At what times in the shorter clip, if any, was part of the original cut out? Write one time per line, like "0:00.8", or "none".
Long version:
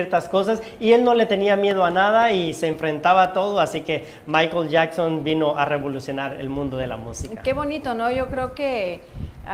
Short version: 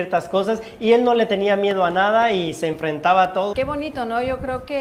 0:03.5